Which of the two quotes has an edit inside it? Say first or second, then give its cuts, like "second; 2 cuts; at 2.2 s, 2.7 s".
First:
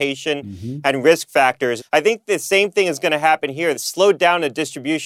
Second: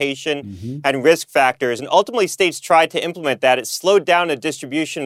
first; 2 cuts; at 1.8 s, 3.7 s